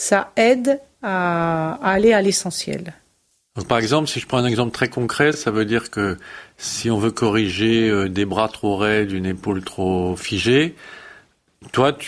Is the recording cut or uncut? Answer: uncut